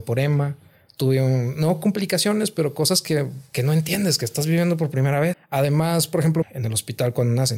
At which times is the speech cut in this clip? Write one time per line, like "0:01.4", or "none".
0:05.3
0:06.4